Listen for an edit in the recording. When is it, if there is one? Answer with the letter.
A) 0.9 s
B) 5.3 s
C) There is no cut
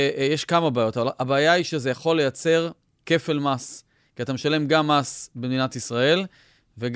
C